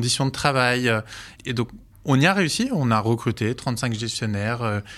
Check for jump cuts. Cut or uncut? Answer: cut